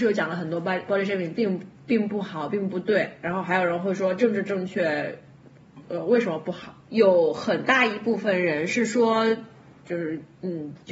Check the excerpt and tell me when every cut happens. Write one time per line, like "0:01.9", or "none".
0:06.9
0:09.8